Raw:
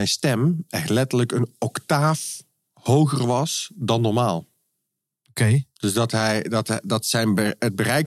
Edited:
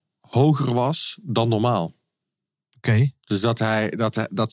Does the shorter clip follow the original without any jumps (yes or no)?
yes